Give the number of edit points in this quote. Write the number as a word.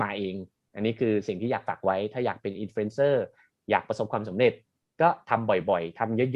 zero